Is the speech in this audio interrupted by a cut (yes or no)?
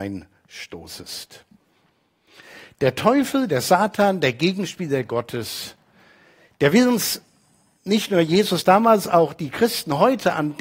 no